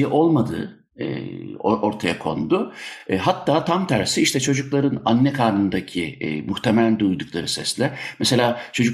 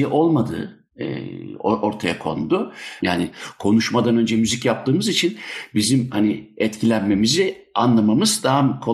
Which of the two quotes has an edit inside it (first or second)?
second